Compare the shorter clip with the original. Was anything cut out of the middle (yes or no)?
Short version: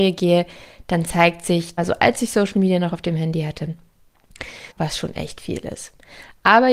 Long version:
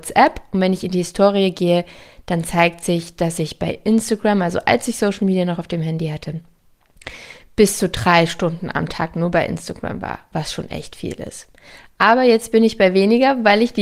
yes